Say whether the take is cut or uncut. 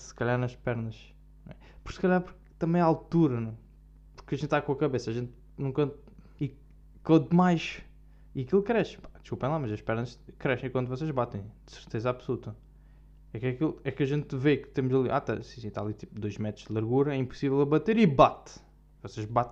cut